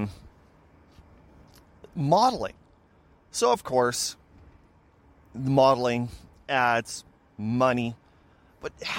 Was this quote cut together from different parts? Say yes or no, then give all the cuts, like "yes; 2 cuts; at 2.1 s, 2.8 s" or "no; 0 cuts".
no; 0 cuts